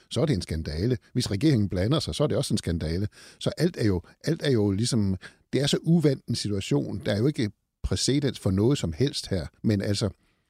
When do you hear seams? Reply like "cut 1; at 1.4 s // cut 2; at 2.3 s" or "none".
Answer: cut 1; at 9.6 s